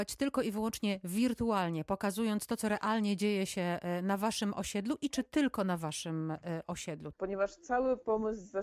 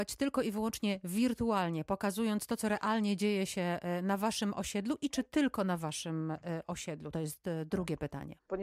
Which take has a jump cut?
first; 1 cut; at 7.1 s

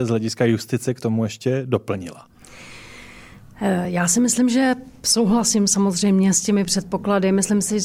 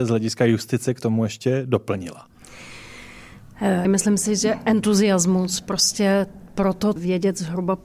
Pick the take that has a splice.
second; 2 cuts; at 3.8 s, 7.0 s

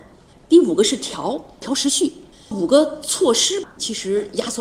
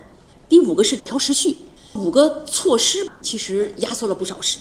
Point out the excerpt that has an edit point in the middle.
second; 1 cut; at 1.0 s

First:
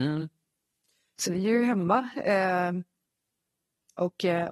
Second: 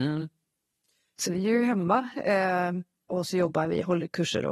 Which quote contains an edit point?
second; 1 cut; at 3.1 s

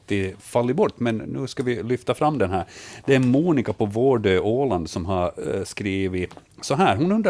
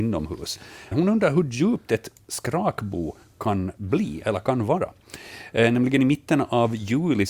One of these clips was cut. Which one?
second; 1 cut; at 0.9 s

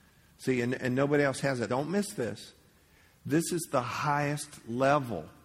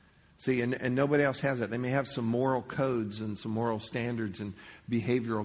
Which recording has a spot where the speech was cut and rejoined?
first; 1 cut; at 1.7 s

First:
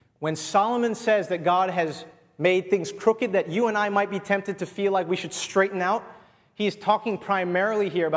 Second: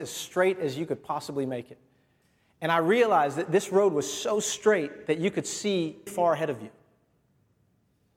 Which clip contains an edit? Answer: second; 1 cut; at 6.1 s

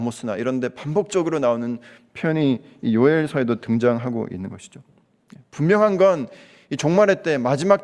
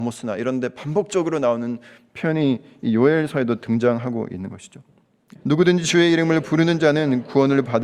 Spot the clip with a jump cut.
second; 1 cut; at 5.4 s

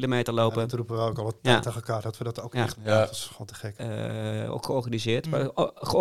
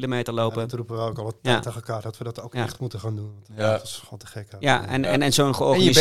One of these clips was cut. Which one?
first; 2 cuts; at 2.7 s, 3.8 s

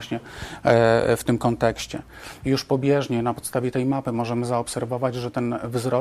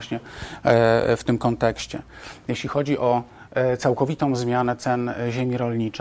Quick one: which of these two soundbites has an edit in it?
first; 1 cut; at 2.4 s

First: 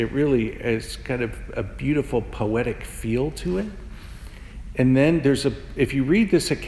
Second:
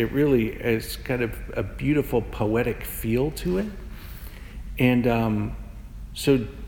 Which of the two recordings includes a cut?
first; 1 cut; at 4.7 s

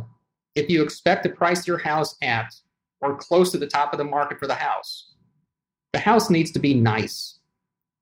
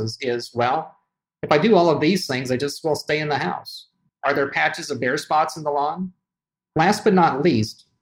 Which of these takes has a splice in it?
second; 2 cuts; at 4.1 s, 6.7 s

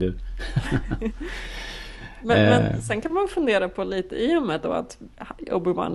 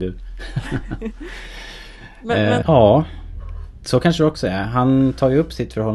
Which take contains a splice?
second; 1 cut; at 2.6 s

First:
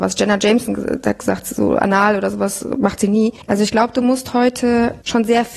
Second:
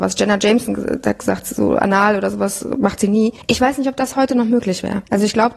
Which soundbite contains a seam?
first; 1 cut; at 3.4 s

